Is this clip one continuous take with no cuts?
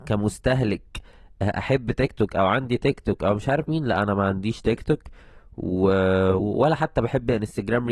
no; 1 cut; at 6.4 s

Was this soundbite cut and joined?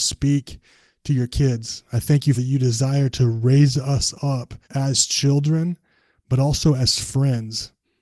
yes; 2 cuts; at 2.3 s, 4.6 s

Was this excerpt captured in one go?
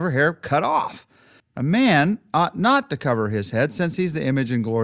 no; 1 cut; at 1.4 s

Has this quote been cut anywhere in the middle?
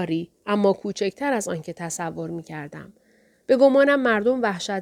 no; 0 cuts

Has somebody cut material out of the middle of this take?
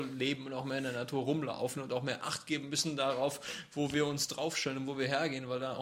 no; 0 cuts

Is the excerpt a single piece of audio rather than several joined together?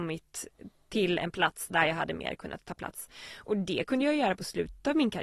yes; 0 cuts

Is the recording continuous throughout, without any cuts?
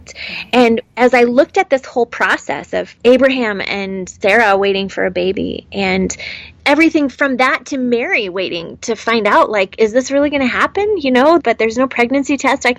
no; 1 cut; at 11.4 s

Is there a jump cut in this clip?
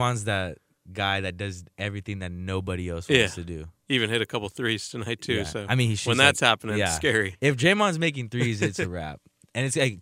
no; 0 cuts

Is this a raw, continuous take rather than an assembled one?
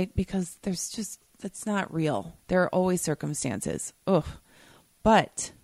no; 2 cuts; at 2.4 s, 4.0 s

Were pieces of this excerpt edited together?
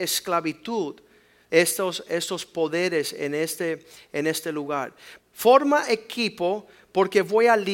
yes; 1 cut; at 5.2 s

